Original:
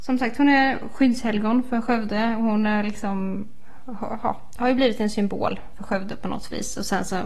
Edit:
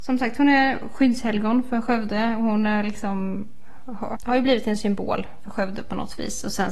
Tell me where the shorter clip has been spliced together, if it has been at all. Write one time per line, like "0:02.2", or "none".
0:04.2